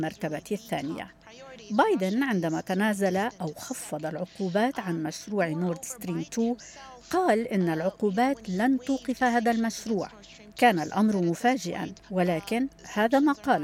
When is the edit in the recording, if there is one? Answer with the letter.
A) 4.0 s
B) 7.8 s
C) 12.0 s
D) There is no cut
C